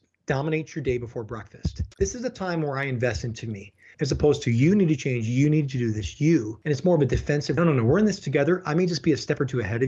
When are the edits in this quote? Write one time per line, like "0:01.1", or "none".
0:01.9
0:03.9
0:07.6